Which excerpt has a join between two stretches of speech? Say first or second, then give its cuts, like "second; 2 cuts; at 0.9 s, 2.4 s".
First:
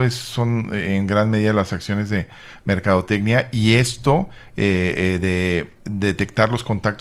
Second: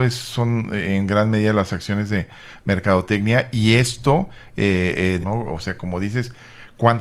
second; 1 cut; at 5.2 s